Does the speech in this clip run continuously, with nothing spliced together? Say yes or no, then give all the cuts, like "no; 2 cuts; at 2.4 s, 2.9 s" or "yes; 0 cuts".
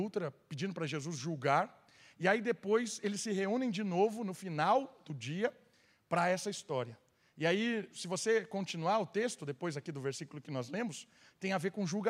yes; 0 cuts